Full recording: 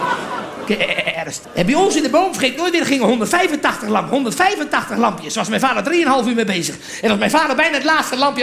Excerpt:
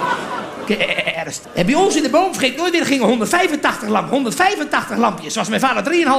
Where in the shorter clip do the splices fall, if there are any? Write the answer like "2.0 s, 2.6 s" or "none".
none